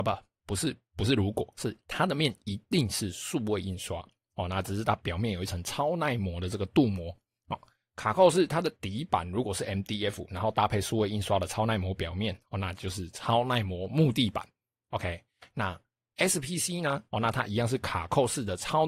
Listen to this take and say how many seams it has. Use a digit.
1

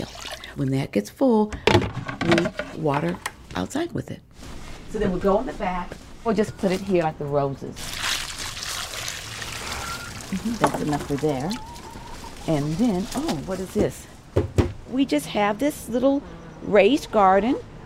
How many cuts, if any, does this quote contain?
0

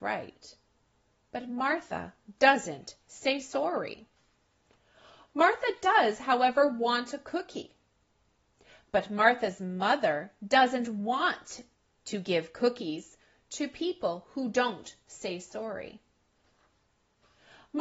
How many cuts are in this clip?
0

